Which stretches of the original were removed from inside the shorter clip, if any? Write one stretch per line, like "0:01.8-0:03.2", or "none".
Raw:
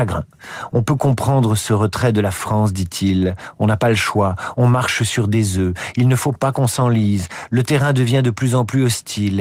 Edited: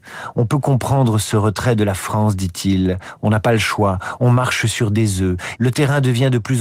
0:05.9-0:07.5